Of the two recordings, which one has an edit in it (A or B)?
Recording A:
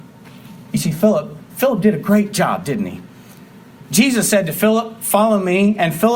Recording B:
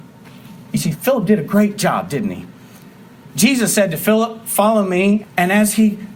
B